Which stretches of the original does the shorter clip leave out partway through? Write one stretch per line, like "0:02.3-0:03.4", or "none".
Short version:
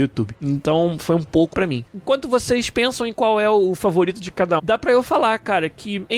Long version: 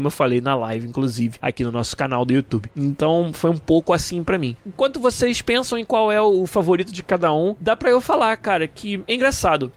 0:03.9-0:04.2
0:07.3-0:07.6